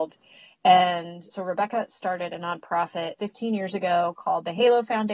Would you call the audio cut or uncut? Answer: cut